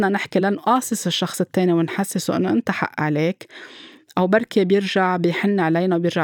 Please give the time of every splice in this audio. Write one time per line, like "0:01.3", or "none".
none